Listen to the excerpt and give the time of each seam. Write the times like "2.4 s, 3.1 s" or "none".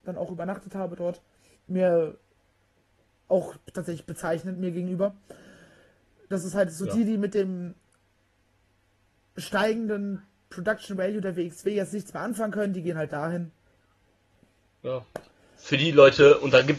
1.6 s